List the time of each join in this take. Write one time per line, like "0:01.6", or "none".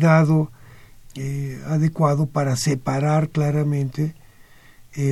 0:01.1